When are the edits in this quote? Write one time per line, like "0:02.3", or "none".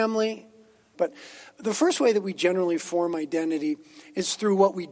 0:00.9